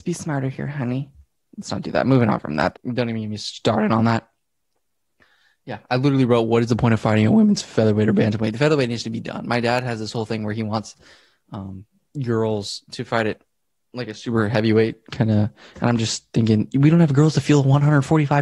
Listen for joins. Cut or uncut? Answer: cut